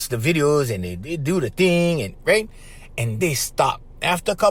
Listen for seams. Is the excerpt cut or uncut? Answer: cut